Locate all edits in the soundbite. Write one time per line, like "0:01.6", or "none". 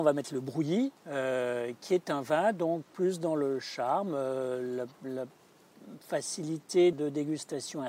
0:01.0
0:06.9